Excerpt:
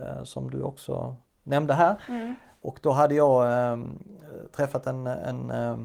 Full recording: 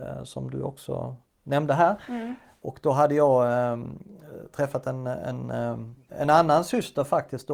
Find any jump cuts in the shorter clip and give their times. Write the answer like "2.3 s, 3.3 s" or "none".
none